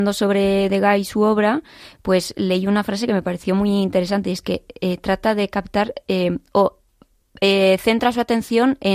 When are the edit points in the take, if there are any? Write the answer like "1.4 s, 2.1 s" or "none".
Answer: none